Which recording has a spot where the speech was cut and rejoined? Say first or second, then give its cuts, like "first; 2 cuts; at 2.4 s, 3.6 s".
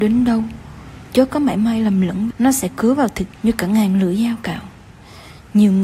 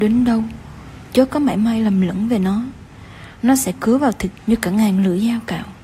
first; 1 cut; at 2.3 s